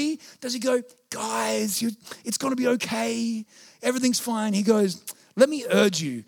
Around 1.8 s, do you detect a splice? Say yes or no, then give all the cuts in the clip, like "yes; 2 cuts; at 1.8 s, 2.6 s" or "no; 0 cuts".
no; 0 cuts